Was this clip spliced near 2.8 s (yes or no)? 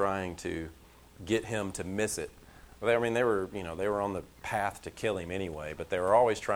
no